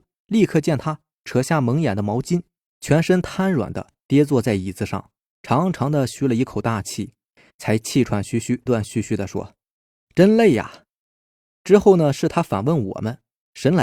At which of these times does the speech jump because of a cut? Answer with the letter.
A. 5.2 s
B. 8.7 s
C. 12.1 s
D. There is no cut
B